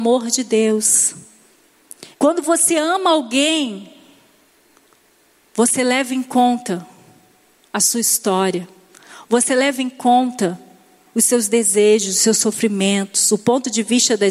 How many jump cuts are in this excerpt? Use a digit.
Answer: 1